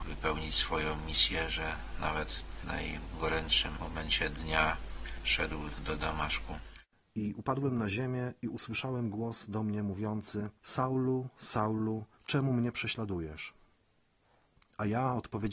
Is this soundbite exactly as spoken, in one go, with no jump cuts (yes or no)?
no